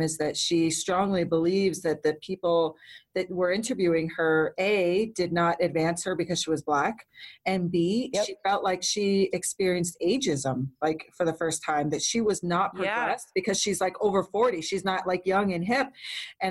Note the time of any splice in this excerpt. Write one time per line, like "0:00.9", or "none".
none